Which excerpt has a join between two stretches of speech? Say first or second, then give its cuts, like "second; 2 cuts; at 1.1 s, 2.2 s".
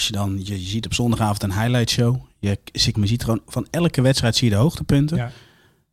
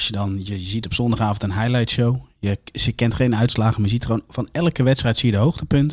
first; 1 cut; at 2.9 s